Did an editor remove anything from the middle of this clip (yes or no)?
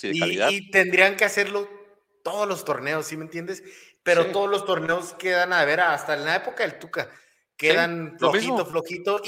no